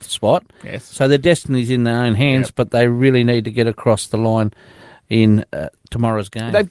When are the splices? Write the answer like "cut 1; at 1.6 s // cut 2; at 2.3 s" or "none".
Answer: none